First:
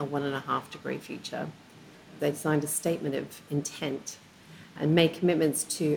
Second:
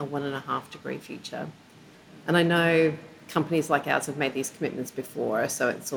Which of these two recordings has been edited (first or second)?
first